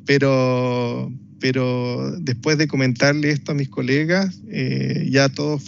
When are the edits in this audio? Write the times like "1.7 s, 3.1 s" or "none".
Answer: none